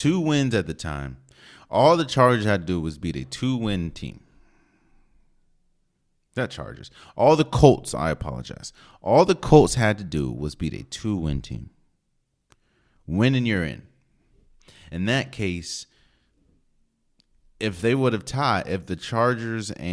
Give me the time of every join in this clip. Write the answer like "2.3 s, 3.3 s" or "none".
none